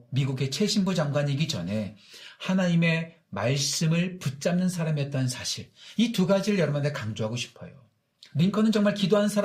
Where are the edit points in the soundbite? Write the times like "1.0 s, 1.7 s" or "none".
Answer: none